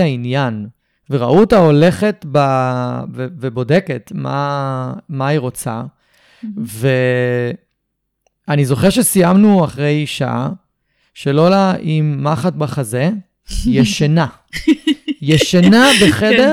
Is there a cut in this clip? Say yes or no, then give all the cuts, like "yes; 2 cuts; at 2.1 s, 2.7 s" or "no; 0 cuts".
no; 0 cuts